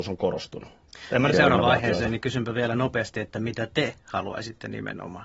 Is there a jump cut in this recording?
yes; 1 cut; at 1.3 s

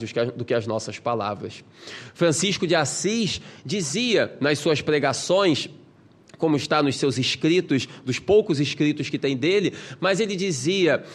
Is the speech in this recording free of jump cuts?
yes; 0 cuts

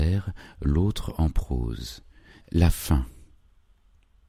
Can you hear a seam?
yes; 1 cut; at 2.4 s

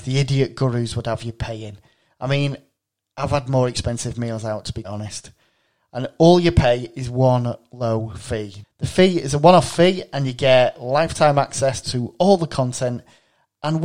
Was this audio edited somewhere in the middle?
yes; 3 cuts; at 4.8 s, 8.6 s, 11.8 s

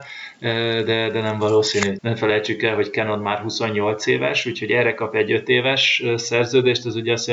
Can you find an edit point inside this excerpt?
yes; 1 cut; at 2.0 s

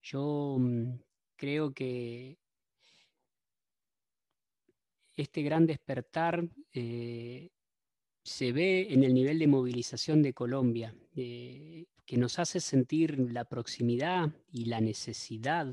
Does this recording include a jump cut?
no; 0 cuts

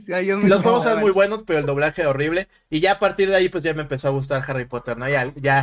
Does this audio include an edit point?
no; 0 cuts

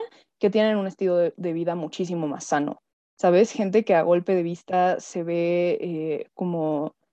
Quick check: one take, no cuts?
yes; 0 cuts

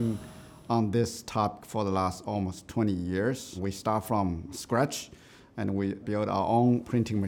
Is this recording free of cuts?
yes; 0 cuts

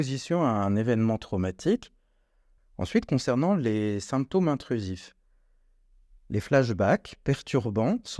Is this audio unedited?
no; 1 cut; at 2.6 s

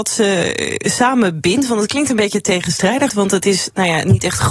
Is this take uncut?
no; 1 cut; at 3.1 s

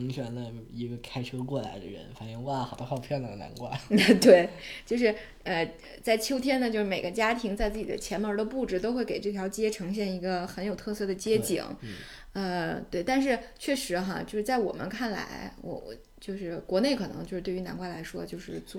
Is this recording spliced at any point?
no; 0 cuts

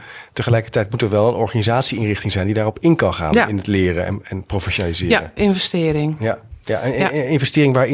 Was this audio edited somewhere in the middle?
yes; 1 cut; at 5.4 s

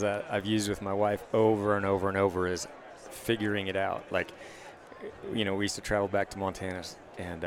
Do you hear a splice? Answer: no; 0 cuts

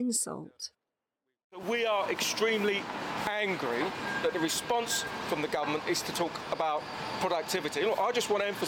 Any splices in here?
no; 0 cuts

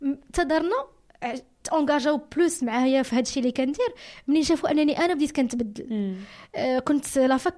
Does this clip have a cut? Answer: yes; 1 cut; at 1.6 s

